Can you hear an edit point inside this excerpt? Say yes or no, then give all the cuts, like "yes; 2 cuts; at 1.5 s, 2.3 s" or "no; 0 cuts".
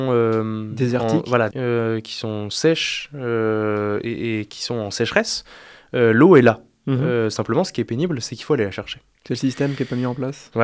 yes; 1 cut; at 1.5 s